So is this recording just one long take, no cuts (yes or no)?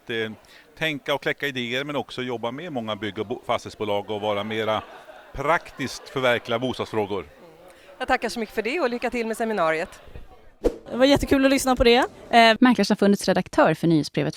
no